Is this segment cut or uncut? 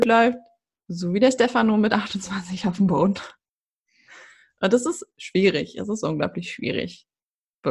uncut